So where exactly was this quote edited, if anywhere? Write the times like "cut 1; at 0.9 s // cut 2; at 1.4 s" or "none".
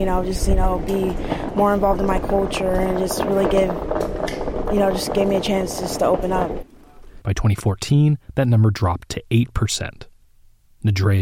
cut 1; at 7.2 s

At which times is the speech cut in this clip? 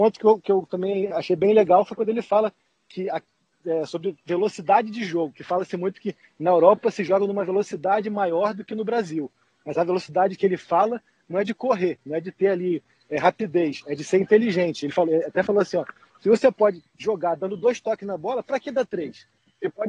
none

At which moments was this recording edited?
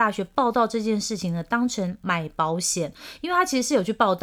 none

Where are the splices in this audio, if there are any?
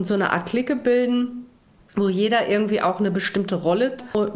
none

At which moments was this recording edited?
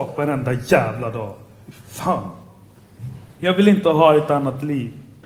cut 1; at 3.4 s

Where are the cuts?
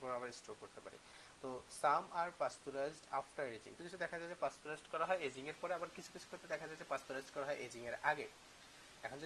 cut 1; at 3.8 s

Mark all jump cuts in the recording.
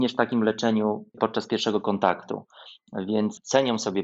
none

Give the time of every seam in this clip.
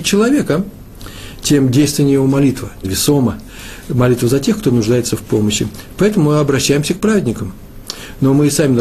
cut 1; at 2.8 s

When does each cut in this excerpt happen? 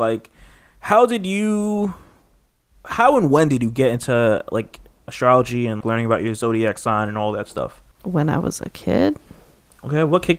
cut 1; at 5.8 s // cut 2; at 7.9 s

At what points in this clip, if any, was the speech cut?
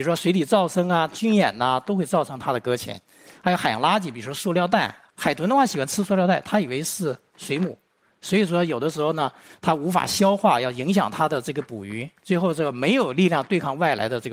none

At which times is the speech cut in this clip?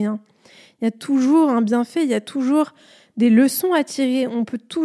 none

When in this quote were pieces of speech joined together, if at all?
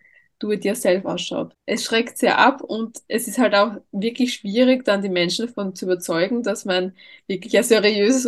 none

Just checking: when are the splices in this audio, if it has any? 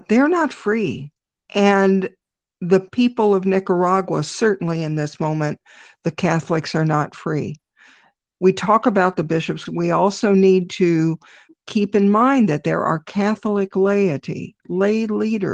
cut 1; at 9.7 s

